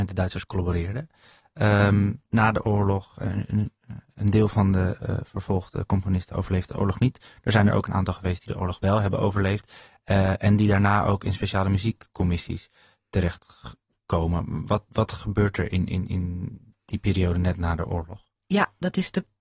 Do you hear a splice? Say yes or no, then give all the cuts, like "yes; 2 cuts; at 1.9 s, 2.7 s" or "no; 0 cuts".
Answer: no; 0 cuts